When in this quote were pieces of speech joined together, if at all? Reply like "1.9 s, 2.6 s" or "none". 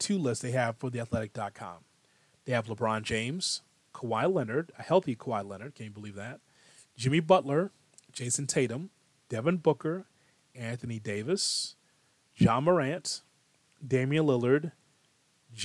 none